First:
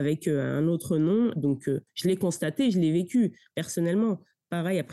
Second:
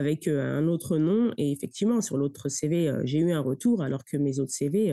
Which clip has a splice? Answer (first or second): first